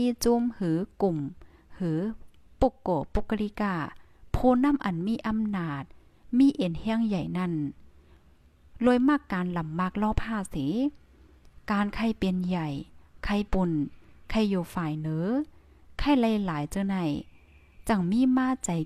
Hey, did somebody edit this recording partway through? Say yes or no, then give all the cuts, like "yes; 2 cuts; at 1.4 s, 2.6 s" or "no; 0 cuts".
yes; 1 cut; at 13.5 s